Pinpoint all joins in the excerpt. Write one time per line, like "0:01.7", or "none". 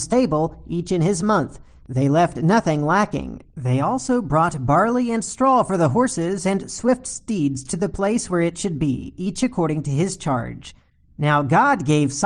none